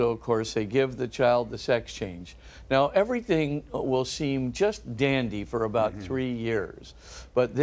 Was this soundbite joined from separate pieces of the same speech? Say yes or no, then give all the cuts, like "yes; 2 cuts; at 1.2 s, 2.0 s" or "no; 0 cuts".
no; 0 cuts